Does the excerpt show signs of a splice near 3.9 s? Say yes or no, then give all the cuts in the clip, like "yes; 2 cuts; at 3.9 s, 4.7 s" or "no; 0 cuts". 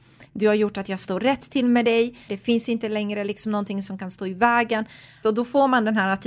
no; 2 cuts; at 2.3 s, 5.2 s